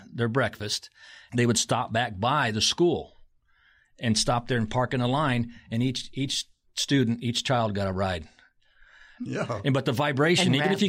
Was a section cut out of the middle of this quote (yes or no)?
yes